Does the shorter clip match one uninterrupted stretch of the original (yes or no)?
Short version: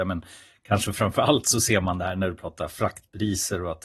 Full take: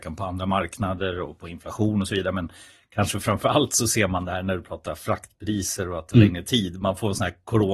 yes